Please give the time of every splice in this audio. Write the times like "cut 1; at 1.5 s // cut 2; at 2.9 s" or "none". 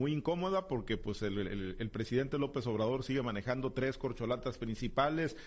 none